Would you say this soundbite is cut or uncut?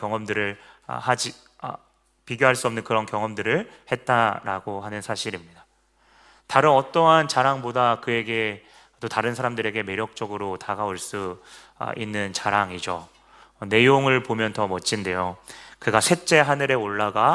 uncut